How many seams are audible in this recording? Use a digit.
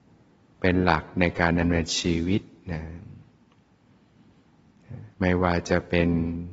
1